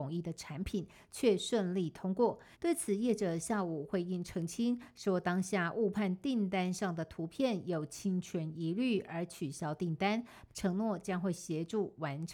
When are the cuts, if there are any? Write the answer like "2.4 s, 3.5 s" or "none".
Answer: 2.5 s, 10.5 s